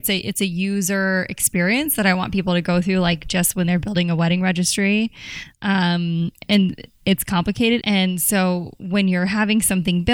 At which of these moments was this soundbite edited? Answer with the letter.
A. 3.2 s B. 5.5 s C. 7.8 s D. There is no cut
C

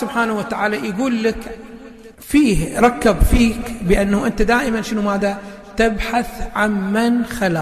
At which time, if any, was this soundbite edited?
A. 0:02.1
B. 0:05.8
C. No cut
A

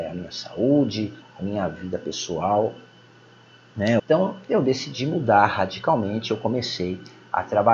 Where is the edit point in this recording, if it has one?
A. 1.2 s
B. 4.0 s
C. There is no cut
B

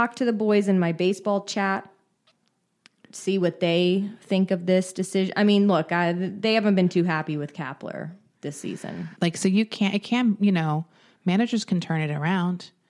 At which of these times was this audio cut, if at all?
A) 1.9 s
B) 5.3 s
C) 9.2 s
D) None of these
C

